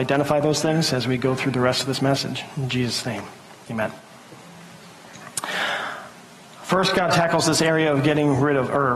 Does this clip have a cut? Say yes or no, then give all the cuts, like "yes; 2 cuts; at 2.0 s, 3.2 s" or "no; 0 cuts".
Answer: no; 0 cuts